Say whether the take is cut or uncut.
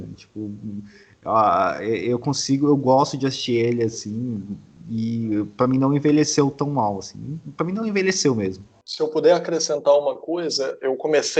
uncut